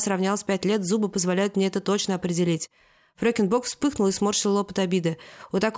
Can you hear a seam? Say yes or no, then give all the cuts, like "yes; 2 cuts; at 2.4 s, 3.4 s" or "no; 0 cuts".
no; 0 cuts